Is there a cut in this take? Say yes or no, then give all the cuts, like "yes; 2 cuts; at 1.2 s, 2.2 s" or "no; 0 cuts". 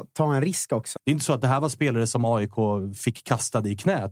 yes; 1 cut; at 1.0 s